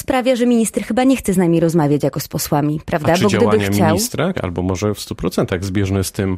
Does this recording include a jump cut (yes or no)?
yes